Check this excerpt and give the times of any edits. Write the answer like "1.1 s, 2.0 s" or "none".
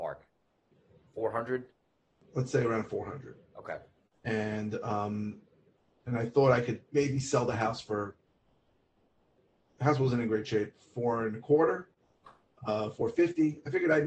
none